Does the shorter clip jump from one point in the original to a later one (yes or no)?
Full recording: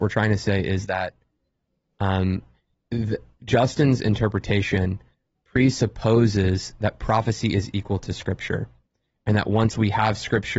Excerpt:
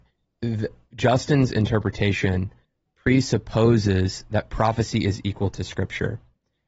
no